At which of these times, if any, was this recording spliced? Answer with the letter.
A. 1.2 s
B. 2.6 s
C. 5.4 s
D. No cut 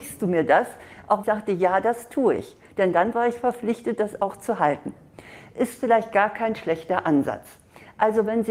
A